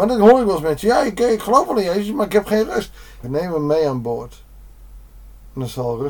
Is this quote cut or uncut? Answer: cut